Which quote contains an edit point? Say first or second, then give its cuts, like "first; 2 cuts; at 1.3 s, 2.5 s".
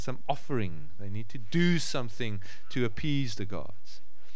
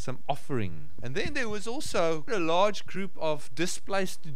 second; 2 cuts; at 1.0 s, 2.3 s